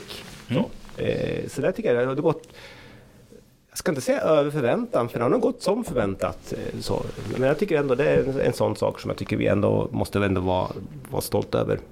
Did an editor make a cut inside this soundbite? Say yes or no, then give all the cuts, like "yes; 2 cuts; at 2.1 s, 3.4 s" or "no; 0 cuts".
no; 0 cuts